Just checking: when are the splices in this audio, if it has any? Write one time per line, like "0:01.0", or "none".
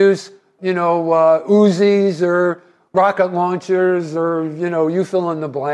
none